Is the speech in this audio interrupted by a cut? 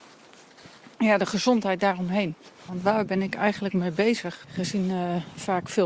yes; 3 cuts; at 0.9 s, 2.7 s, 4.4 s

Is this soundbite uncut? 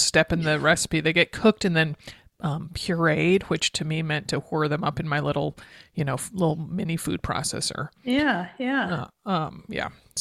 yes; 0 cuts

